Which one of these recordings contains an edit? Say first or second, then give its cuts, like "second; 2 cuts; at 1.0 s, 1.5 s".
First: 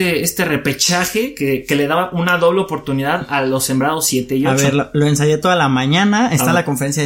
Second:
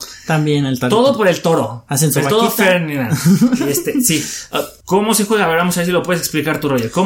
second; 1 cut; at 4.8 s